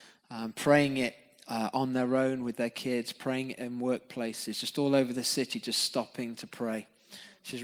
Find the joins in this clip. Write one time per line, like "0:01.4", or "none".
none